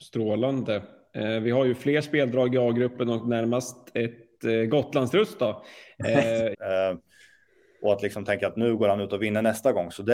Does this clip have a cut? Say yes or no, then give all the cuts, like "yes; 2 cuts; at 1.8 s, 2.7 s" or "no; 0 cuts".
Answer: yes; 1 cut; at 6.5 s